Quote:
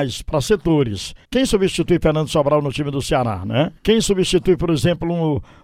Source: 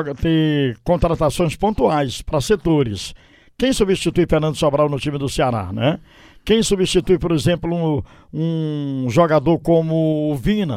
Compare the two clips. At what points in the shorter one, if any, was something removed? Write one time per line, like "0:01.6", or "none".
0:01.2
0:03.8